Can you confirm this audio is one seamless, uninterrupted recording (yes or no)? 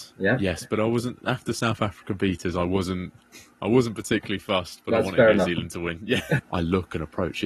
no